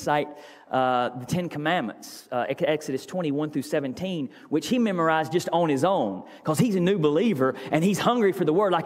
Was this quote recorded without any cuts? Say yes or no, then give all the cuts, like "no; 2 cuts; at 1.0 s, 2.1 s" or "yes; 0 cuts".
yes; 0 cuts